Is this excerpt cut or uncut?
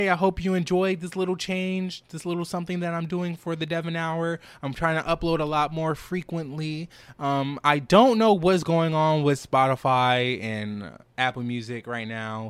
uncut